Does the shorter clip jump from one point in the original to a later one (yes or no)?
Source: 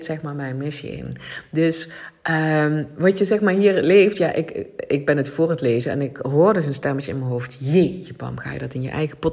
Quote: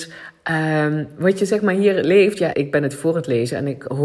yes